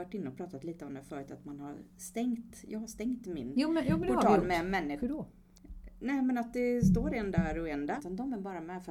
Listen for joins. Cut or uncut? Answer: cut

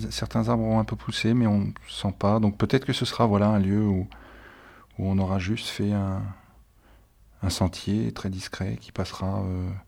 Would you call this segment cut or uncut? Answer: uncut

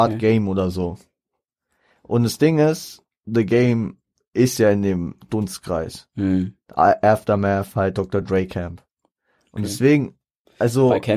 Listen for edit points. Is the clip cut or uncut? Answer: uncut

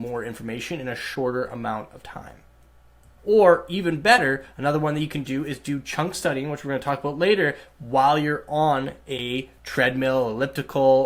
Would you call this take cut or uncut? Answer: cut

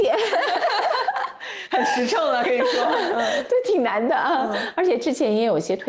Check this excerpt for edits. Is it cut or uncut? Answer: uncut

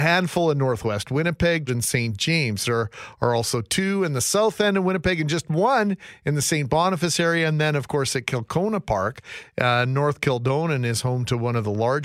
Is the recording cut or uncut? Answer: cut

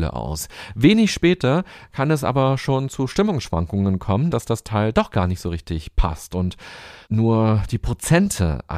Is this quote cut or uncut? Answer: cut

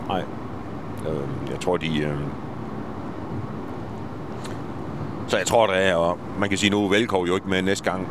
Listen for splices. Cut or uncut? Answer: uncut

